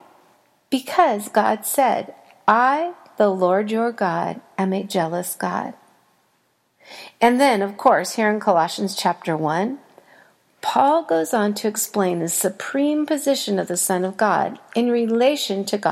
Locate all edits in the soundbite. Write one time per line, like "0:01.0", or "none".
none